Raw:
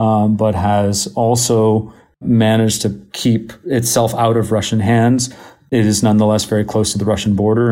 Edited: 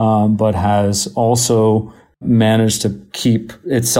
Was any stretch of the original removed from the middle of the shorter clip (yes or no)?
no